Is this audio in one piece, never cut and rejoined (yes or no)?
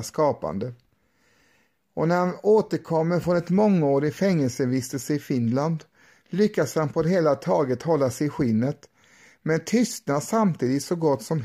yes